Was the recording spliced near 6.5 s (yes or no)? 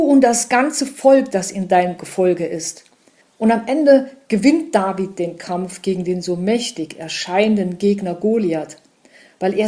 no